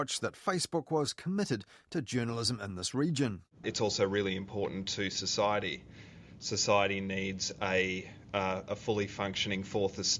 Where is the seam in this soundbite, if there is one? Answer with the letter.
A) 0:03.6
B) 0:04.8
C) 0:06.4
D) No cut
A